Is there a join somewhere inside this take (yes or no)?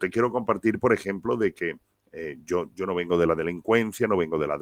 no